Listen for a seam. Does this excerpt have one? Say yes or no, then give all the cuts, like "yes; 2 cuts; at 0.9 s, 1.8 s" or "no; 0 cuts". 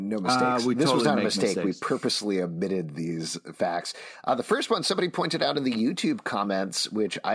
no; 0 cuts